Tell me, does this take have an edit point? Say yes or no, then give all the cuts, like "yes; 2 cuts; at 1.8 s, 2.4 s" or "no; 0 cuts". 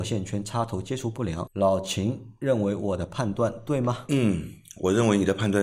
yes; 1 cut; at 1.5 s